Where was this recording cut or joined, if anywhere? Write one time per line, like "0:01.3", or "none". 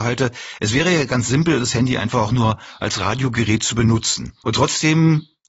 0:04.4